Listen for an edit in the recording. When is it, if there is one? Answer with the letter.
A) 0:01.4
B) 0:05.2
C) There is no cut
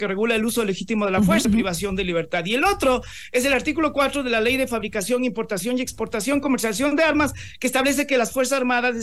A